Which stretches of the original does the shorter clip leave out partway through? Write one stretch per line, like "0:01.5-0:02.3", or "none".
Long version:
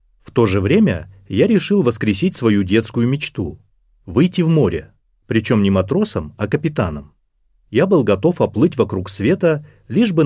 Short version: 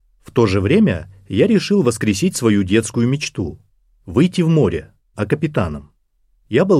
0:05.1-0:06.4